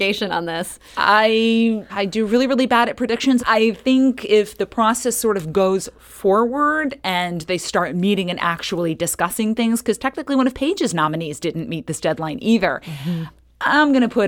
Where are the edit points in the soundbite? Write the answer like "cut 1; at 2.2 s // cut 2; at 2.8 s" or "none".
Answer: cut 1; at 1.9 s // cut 2; at 3.4 s